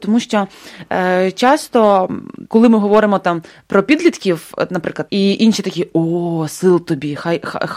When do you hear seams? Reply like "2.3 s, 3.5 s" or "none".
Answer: 2.5 s, 5.1 s